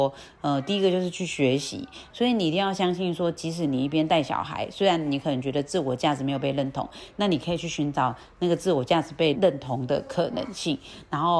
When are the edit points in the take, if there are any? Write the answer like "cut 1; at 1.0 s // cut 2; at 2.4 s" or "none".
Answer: cut 1; at 2.1 s // cut 2; at 9.3 s